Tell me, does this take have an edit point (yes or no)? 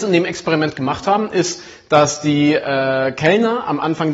no